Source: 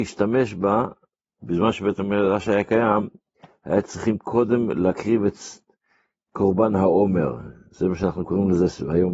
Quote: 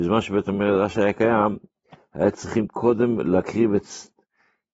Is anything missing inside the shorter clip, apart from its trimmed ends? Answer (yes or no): no